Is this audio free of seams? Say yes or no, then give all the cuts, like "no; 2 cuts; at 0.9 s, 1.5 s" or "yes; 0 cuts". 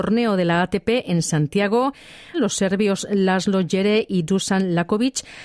no; 1 cut; at 2.3 s